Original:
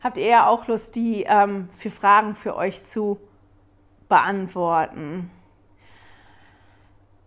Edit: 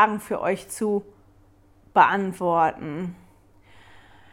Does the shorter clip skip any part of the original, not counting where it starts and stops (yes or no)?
no